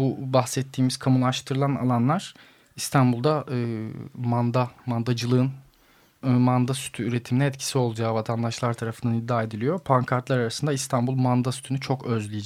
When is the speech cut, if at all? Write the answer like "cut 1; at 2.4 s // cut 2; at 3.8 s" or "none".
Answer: cut 1; at 6.2 s